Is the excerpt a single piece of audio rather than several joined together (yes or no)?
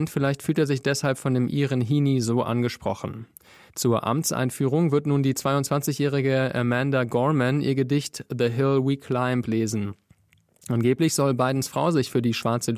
no